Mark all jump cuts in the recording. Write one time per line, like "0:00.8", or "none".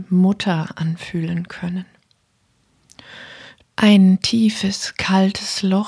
0:03.6